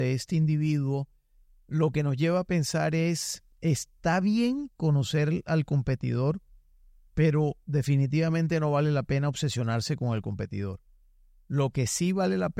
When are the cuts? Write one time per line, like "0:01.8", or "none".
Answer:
0:03.5